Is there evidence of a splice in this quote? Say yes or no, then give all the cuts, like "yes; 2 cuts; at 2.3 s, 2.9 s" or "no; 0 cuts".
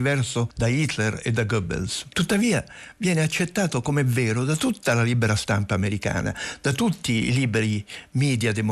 yes; 1 cut; at 2.1 s